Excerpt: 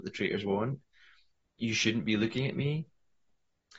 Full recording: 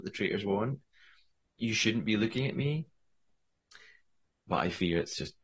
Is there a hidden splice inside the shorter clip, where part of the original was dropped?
no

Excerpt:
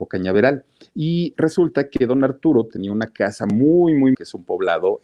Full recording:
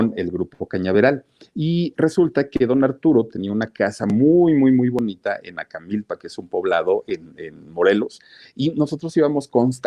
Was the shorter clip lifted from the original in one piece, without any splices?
no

